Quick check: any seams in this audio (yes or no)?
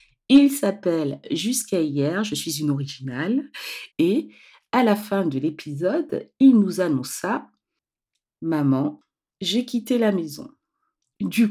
yes